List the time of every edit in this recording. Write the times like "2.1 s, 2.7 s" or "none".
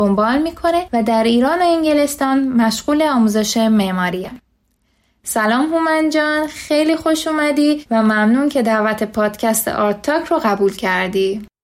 none